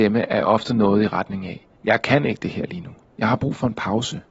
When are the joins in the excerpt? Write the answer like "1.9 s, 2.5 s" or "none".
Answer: 1.8 s, 3.1 s